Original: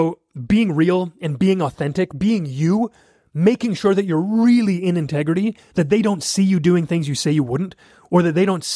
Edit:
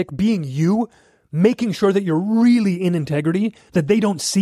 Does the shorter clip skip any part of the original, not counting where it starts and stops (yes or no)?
no